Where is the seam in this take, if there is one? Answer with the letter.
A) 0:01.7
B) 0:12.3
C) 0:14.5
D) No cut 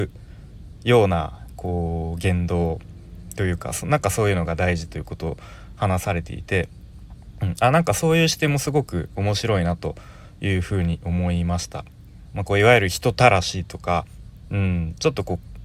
B